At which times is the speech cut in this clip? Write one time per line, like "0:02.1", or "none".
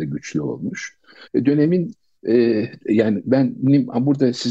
0:01.2